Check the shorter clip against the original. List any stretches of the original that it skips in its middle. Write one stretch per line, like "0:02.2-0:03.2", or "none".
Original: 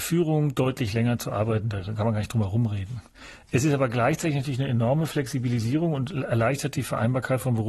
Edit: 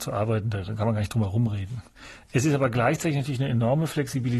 none